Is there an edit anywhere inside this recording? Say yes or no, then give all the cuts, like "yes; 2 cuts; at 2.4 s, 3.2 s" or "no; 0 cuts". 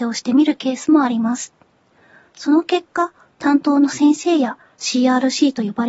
no; 0 cuts